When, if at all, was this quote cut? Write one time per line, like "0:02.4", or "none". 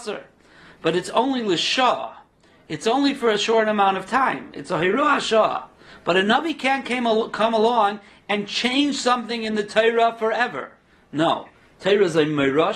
none